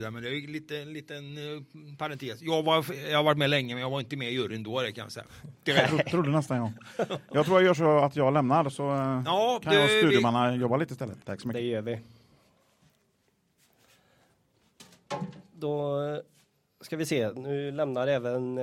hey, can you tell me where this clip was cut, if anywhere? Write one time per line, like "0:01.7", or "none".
0:05.7
0:11.2